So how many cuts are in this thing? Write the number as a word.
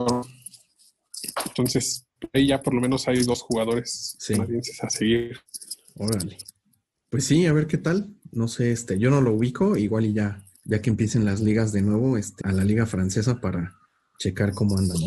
two